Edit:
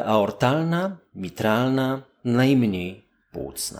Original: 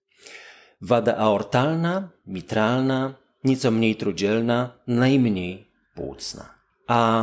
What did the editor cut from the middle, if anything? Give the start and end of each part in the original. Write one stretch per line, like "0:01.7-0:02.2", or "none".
0:03.3-0:04.8